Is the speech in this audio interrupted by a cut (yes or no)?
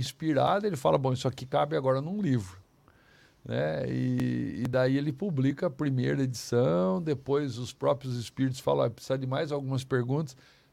no